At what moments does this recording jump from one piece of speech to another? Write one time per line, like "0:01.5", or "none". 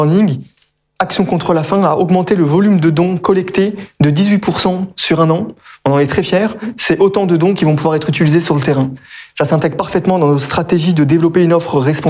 0:09.3